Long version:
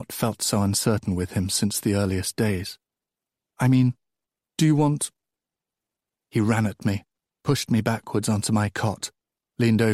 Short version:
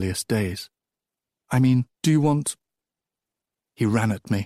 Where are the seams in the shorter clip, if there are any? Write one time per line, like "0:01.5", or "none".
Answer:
0:01.9